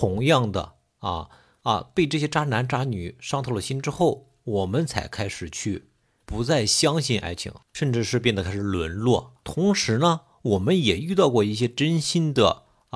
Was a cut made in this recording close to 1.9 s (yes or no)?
no